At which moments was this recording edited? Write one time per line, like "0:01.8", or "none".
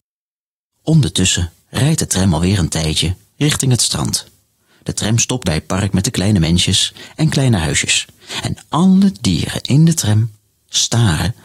0:05.4
0:08.4